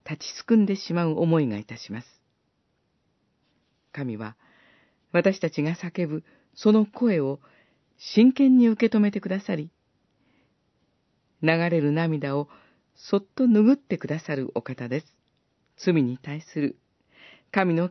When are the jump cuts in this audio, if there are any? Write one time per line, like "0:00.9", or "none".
0:15.6